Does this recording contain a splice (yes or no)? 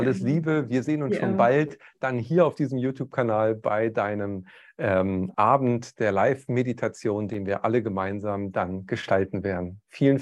no